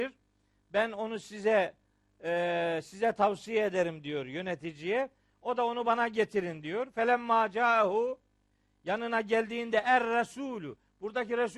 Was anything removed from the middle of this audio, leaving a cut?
no; 0 cuts

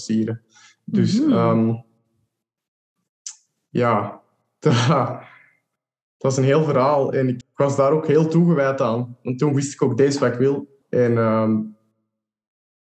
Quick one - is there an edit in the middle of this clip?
yes; 2 cuts; at 7.4 s, 10.8 s

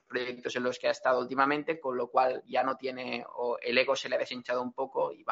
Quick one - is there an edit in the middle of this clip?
no; 0 cuts

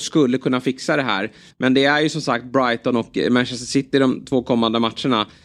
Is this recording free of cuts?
yes; 0 cuts

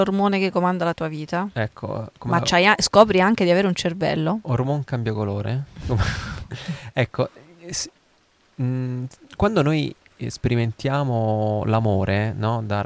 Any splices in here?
no; 0 cuts

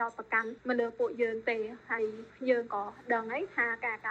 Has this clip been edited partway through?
no; 0 cuts

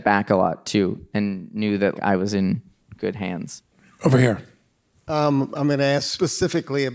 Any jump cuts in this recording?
yes; 1 cut; at 1.9 s

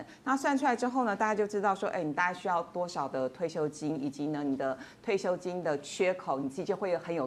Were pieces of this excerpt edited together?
no; 0 cuts

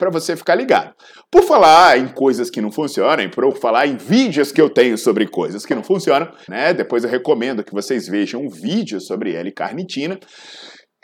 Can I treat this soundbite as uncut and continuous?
no; 1 cut; at 6.5 s

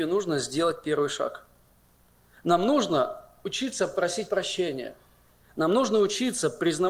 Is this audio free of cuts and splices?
yes; 0 cuts

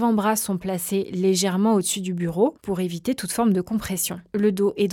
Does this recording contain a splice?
no; 0 cuts

